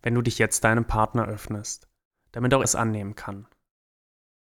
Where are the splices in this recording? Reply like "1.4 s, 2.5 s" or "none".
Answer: 2.6 s